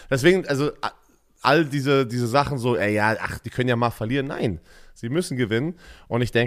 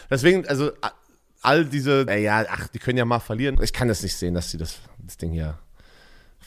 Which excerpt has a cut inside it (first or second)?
second